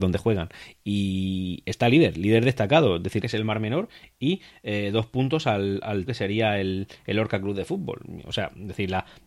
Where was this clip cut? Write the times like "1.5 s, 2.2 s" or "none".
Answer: 3.2 s, 6.1 s